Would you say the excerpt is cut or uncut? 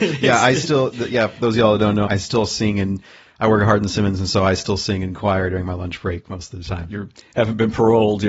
cut